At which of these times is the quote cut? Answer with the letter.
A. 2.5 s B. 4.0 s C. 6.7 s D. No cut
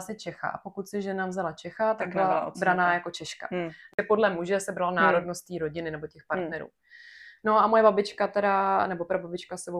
D